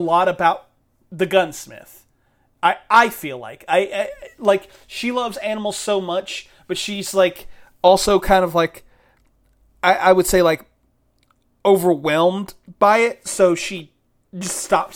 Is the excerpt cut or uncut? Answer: uncut